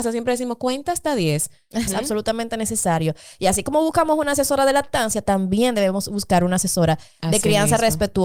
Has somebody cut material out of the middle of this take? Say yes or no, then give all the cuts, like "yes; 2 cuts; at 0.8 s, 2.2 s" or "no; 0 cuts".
yes; 1 cut; at 1.9 s